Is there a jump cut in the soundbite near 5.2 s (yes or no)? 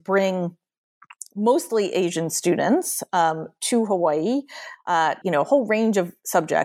yes